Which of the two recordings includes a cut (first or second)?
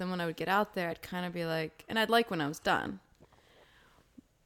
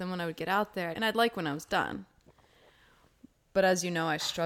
second